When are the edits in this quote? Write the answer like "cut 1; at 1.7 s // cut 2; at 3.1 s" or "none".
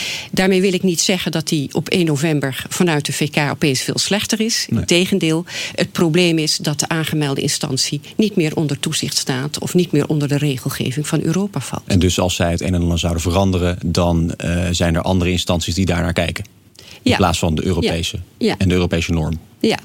none